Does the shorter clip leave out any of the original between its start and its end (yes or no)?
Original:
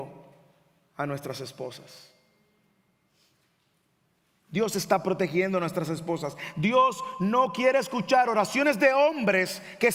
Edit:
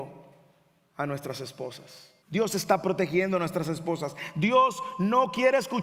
yes